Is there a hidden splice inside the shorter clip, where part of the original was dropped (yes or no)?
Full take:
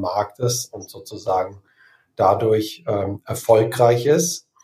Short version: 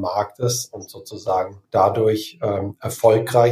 yes